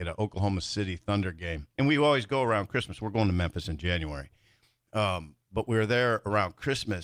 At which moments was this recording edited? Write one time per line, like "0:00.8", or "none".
0:01.7